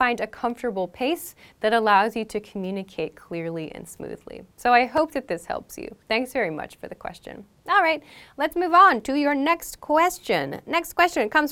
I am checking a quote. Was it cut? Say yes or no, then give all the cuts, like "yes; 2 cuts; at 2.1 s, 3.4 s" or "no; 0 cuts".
no; 0 cuts